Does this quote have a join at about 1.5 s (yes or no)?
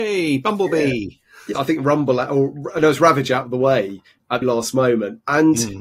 yes